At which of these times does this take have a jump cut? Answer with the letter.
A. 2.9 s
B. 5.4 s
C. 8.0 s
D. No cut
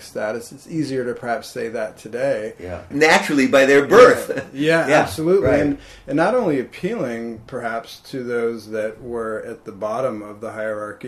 A